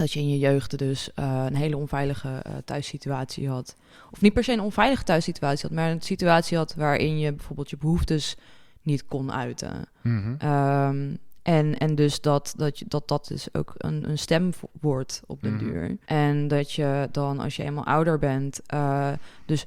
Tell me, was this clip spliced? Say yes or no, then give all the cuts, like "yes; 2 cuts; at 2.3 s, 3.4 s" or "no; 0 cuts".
yes; 1 cut; at 16.0 s